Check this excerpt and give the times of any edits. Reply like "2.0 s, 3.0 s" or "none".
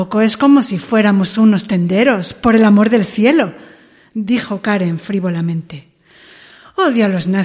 none